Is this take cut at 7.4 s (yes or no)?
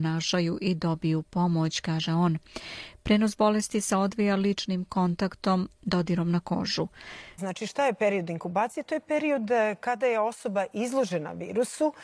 yes